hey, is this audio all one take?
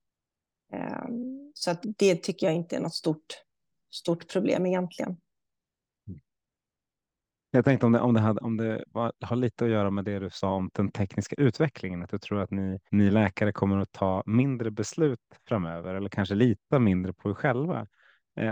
no; 2 cuts; at 1.8 s, 12.9 s

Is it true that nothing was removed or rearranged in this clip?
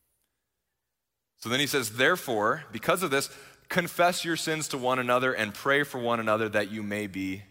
yes; 0 cuts

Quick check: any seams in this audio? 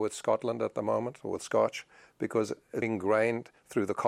yes; 1 cut; at 2.8 s

